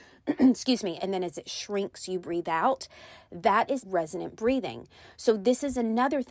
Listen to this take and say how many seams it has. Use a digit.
2